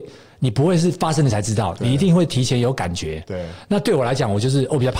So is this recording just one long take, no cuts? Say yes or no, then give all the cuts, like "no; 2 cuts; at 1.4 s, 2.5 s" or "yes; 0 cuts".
yes; 0 cuts